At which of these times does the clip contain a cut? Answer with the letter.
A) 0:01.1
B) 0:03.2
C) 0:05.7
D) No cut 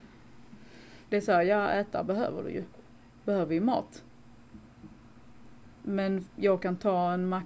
A